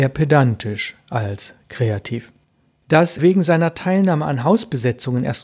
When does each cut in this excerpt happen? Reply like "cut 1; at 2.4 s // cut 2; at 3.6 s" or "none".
cut 1; at 3.2 s